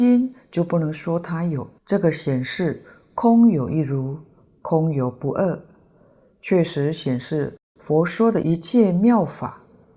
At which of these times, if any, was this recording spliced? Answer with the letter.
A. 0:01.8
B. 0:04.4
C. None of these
A